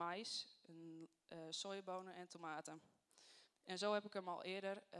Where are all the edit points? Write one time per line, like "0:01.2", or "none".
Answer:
0:03.4